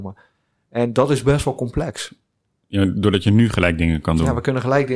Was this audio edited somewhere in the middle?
no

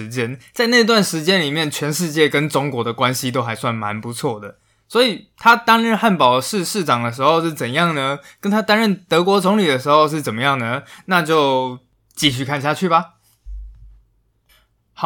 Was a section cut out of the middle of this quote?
no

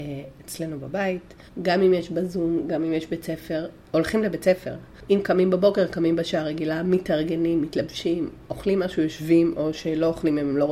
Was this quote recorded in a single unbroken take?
no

